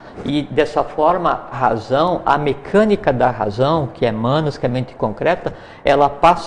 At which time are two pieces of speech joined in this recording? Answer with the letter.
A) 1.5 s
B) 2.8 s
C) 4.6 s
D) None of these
A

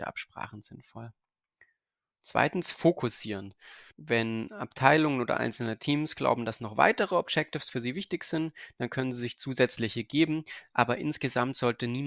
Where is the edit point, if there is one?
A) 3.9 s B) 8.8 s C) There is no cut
A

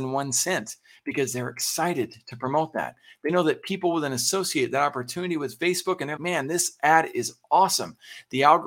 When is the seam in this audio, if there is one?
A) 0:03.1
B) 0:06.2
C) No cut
B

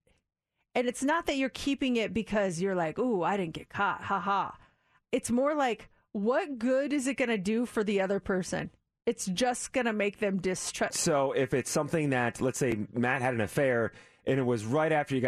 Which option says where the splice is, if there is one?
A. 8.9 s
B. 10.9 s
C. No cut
B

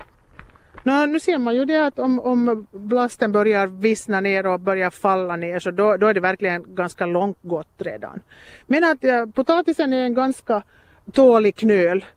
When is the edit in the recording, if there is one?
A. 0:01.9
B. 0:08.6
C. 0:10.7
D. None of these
D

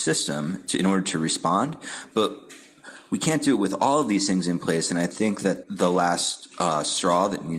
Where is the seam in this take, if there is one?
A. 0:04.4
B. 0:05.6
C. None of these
B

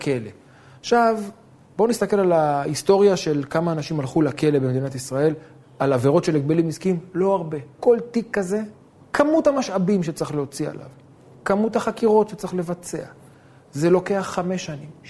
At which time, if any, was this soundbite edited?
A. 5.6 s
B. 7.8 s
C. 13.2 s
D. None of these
B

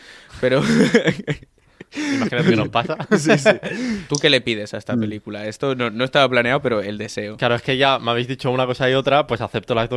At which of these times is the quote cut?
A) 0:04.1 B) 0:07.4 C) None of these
A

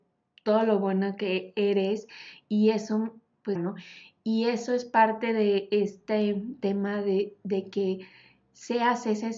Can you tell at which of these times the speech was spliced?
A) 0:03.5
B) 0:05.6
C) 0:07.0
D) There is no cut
A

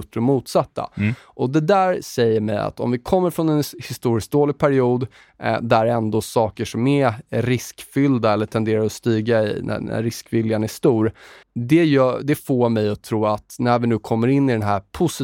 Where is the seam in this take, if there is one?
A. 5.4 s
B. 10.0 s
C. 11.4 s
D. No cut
C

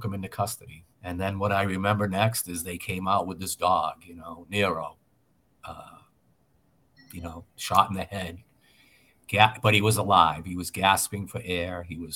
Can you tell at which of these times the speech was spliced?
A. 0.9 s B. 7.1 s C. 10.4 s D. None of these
A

